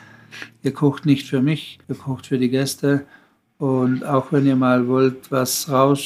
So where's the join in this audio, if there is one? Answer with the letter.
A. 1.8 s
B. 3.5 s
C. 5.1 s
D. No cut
A